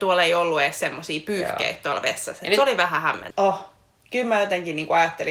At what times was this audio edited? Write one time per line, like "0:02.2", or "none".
0:03.3